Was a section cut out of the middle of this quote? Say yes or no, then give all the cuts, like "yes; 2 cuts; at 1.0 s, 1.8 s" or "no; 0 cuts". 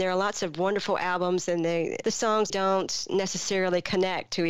yes; 1 cut; at 2.5 s